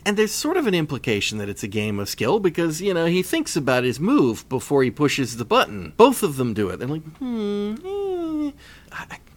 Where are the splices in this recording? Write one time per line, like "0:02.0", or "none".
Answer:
0:06.0
0:07.1